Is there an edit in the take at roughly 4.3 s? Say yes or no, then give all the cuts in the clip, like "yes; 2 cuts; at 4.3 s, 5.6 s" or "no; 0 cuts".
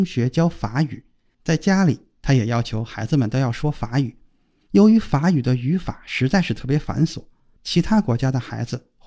no; 0 cuts